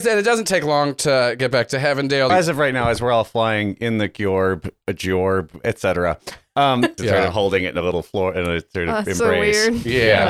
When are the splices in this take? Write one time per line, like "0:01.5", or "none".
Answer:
0:02.3
0:07.0